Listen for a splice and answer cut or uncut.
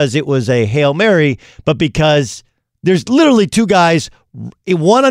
uncut